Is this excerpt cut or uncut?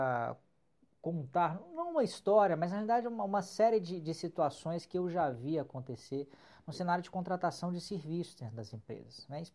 uncut